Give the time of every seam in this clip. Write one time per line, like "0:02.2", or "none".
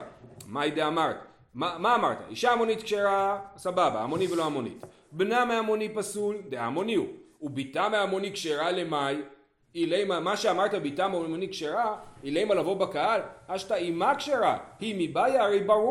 none